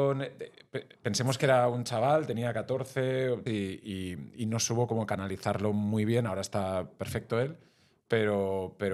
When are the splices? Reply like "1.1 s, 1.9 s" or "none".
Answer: 3.5 s